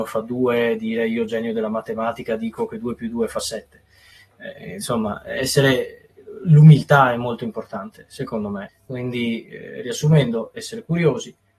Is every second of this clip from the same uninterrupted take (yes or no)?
no